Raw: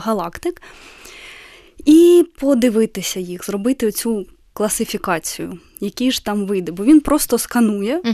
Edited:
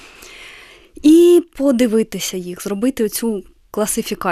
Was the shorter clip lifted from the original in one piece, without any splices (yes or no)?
yes